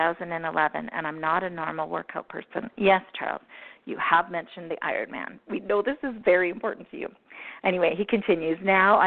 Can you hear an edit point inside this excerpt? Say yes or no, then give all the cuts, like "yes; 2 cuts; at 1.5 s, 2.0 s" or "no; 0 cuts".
no; 0 cuts